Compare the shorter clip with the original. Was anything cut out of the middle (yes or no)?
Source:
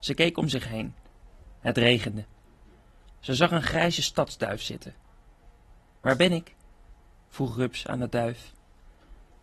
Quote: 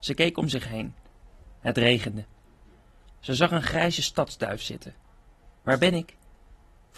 yes